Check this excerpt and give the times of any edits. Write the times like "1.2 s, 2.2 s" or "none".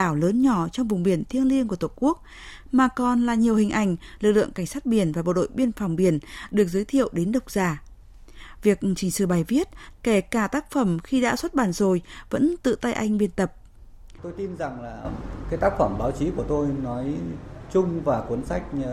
4.2 s, 9.9 s, 14.2 s